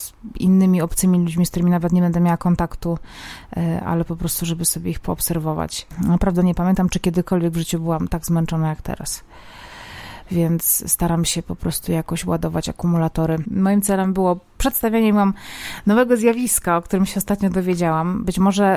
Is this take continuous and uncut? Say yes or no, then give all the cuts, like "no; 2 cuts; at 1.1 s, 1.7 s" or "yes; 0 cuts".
no; 1 cut; at 13.5 s